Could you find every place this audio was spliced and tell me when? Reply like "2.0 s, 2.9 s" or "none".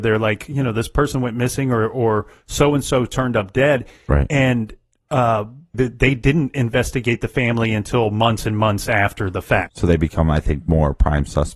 5.7 s, 9.7 s